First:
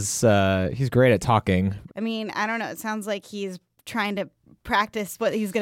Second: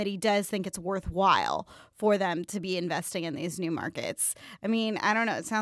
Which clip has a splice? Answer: first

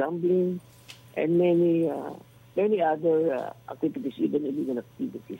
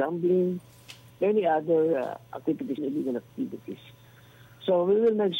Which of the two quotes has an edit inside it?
second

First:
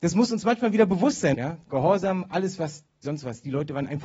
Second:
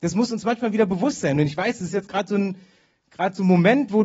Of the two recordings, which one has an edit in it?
first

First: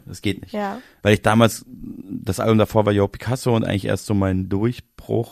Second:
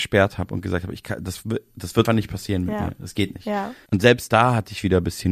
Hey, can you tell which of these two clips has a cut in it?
second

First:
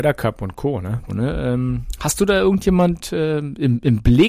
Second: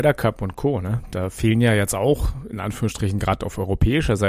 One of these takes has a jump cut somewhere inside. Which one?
first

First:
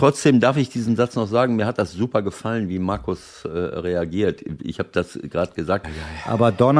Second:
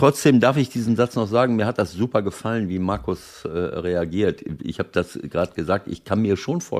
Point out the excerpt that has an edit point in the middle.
first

